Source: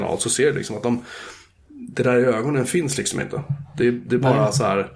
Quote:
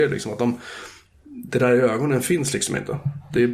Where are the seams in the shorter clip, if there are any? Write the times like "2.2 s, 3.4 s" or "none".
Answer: none